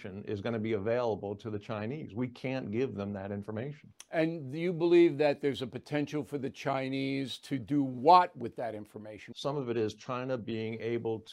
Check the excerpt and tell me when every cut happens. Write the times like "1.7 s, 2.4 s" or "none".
9.3 s